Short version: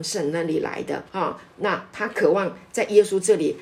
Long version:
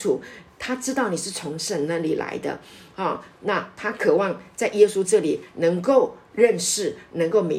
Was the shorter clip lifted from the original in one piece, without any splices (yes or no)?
no